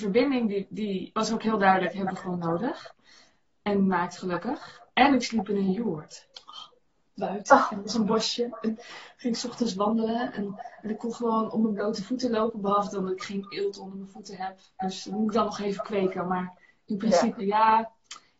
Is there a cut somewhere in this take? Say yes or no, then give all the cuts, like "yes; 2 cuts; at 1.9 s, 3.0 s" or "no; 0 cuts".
yes; 2 cuts; at 1.1 s, 17.4 s